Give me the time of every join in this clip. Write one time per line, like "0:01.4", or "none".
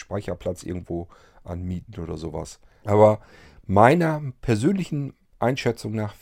0:02.8